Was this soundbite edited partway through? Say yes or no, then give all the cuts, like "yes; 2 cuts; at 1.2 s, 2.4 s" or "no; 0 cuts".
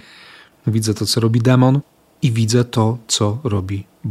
no; 0 cuts